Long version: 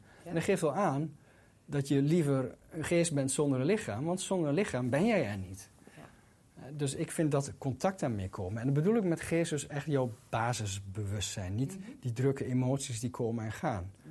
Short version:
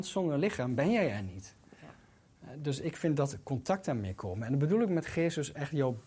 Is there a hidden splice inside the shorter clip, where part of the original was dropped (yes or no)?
no